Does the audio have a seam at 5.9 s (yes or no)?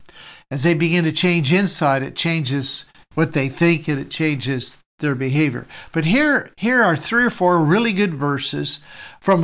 no